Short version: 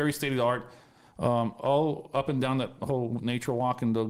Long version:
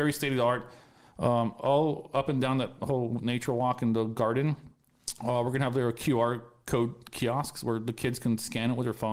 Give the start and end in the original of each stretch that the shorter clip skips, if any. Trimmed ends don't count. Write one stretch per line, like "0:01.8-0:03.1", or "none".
none